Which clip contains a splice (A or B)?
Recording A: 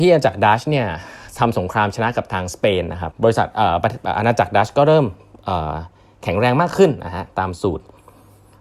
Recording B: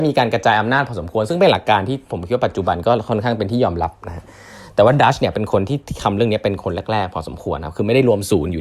A